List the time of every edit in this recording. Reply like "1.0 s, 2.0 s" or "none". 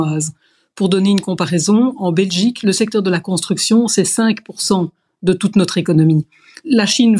none